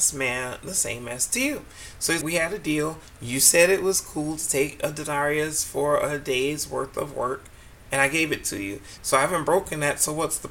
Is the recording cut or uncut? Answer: cut